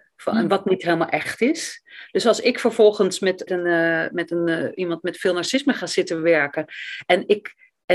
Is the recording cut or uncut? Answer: cut